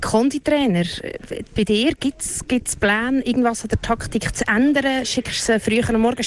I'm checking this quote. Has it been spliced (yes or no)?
no